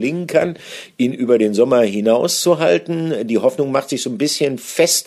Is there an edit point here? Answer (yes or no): no